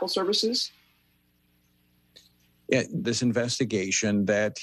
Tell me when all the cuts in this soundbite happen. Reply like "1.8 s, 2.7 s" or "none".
3.0 s